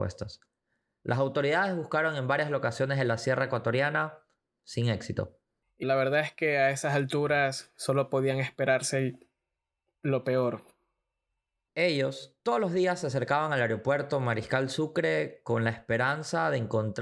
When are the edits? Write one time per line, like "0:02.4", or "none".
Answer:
0:05.8
0:11.7